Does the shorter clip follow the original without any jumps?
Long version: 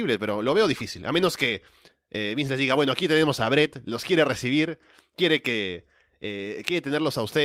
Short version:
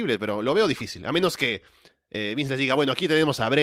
yes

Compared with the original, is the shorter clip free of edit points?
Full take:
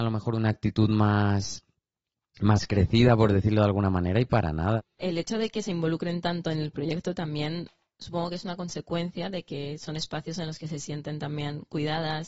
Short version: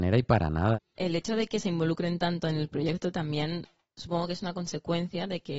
yes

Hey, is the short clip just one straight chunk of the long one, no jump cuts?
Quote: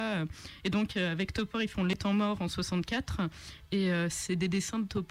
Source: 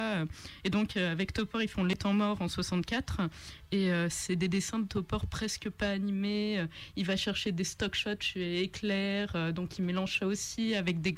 yes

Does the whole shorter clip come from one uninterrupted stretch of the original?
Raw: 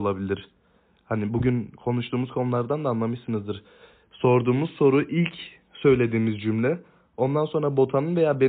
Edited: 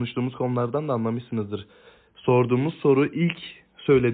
yes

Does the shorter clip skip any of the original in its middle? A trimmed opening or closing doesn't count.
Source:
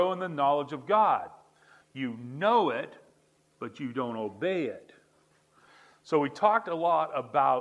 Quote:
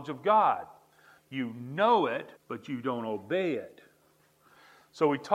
yes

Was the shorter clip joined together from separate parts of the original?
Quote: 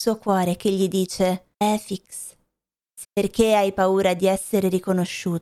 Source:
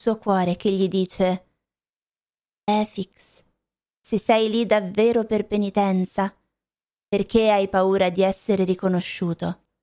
yes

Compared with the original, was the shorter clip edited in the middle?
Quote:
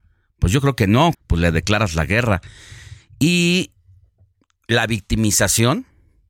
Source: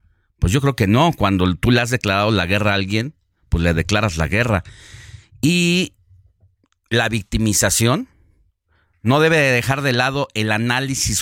yes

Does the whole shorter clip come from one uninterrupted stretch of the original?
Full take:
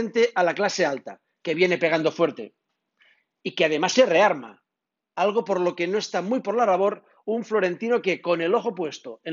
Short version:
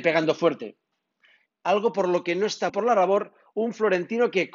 no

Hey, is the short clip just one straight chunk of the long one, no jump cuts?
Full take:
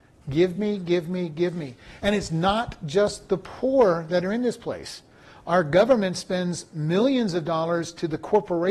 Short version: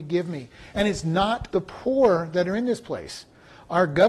no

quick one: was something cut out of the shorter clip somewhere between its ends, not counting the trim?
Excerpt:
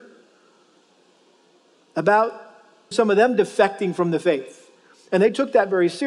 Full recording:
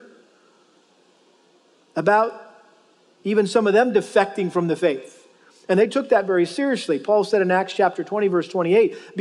yes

